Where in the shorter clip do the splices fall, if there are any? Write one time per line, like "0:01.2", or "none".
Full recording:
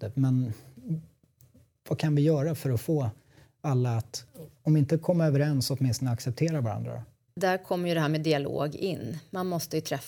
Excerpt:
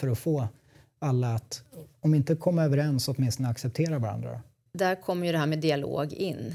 none